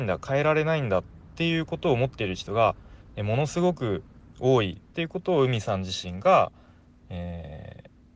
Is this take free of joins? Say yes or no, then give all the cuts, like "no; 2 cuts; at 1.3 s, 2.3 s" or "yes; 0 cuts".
yes; 0 cuts